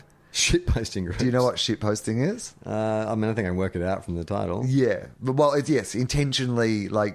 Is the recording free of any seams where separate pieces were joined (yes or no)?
yes